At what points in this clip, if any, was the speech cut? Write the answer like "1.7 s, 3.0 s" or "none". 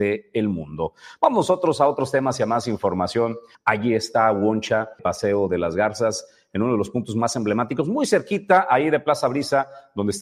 3.5 s, 5.0 s